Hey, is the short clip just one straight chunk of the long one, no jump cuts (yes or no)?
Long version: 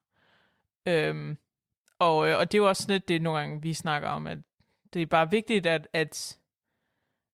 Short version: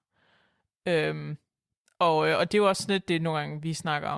yes